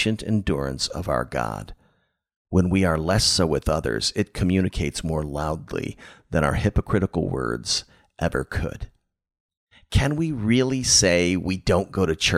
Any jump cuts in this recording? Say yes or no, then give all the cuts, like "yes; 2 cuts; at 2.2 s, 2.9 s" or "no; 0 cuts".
no; 0 cuts